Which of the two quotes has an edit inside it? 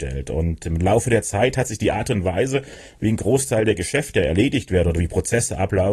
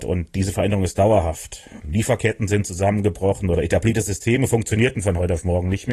second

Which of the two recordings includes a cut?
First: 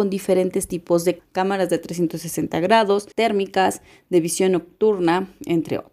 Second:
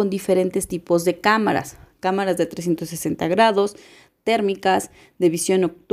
first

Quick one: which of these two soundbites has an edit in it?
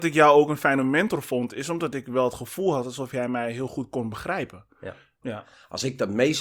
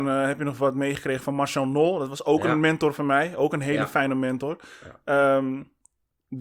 first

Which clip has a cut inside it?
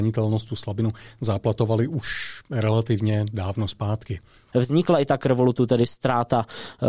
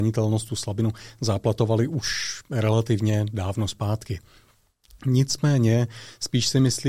first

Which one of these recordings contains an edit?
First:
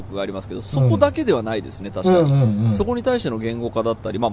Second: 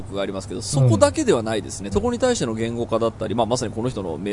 second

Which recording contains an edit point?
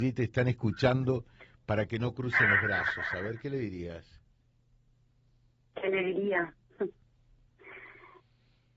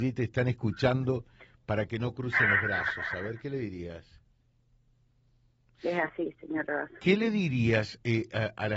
second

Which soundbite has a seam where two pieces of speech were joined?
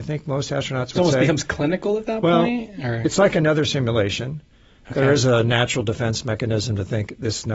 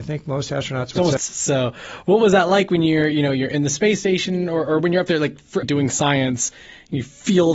second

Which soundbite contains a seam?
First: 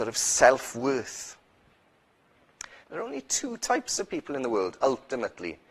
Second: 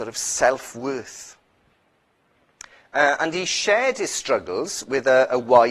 first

